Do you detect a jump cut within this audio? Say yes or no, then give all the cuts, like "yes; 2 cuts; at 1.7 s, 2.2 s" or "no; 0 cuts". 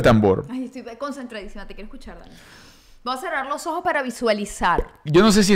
no; 0 cuts